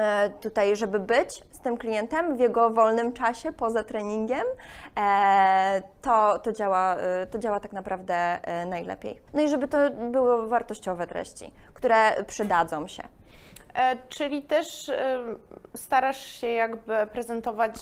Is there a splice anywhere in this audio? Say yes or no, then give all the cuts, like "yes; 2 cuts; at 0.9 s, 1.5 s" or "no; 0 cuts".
yes; 1 cut; at 9.3 s